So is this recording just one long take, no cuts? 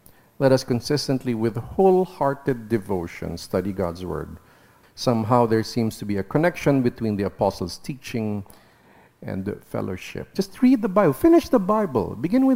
no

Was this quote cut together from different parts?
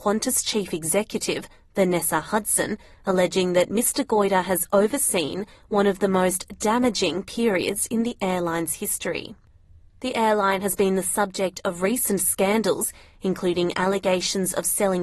yes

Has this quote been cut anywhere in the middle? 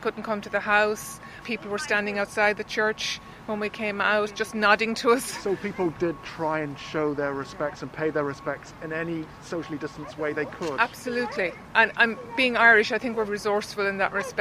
yes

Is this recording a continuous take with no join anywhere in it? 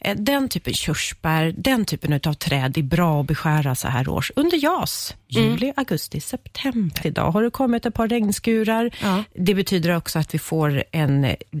no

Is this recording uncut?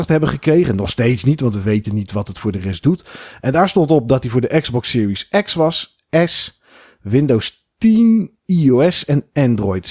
yes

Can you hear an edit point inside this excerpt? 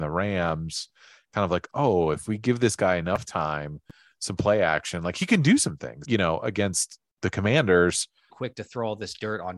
yes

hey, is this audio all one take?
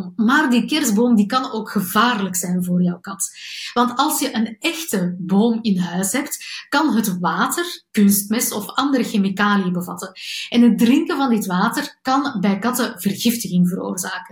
no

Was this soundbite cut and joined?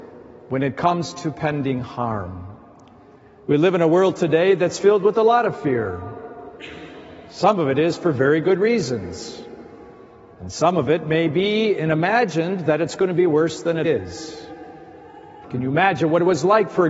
yes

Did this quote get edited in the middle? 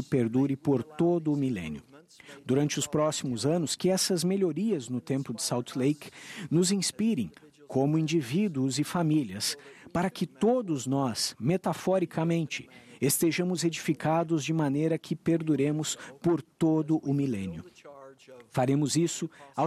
no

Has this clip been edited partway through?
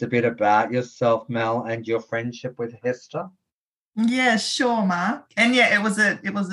no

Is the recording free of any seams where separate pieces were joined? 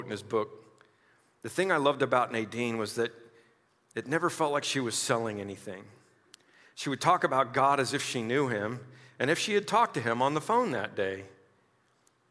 yes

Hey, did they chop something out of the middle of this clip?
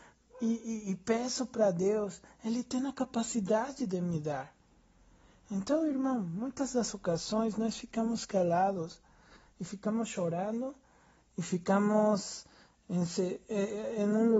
no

